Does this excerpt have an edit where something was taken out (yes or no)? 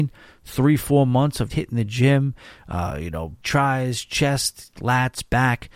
yes